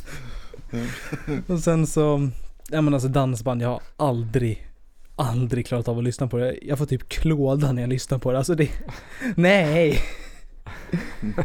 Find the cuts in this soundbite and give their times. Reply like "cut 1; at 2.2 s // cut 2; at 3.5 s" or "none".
none